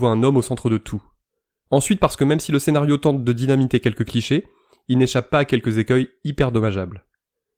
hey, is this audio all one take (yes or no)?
no